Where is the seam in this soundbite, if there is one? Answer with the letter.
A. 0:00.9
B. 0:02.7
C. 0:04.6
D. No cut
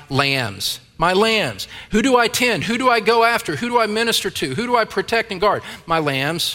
D